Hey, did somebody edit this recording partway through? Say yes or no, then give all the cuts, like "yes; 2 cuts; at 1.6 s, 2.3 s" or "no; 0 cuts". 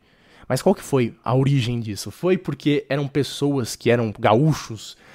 yes; 2 cuts; at 1.2 s, 4.1 s